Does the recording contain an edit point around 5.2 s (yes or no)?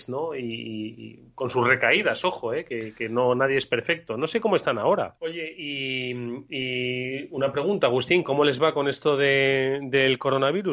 yes